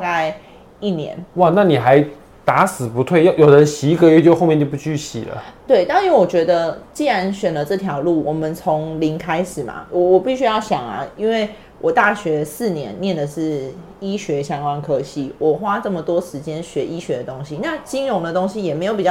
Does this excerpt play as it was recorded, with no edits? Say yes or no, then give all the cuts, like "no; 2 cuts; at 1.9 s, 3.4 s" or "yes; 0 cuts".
no; 1 cut; at 1.3 s